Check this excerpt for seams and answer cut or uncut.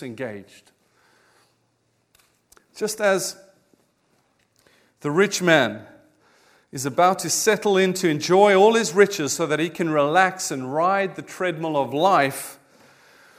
uncut